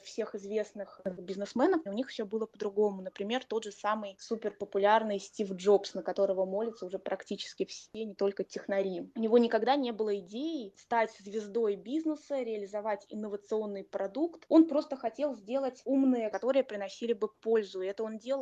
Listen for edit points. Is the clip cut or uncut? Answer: cut